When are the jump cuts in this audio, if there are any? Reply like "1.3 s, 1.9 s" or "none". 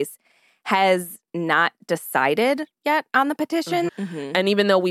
3.9 s